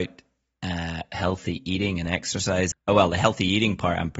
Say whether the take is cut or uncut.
cut